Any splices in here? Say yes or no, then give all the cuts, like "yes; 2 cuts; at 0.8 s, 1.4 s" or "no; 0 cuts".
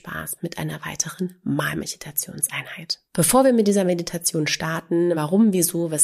yes; 2 cuts; at 3.1 s, 5.1 s